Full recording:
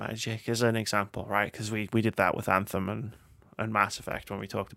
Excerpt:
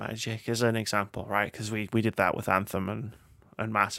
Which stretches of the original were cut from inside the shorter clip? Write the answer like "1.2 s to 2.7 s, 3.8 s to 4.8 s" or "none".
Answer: none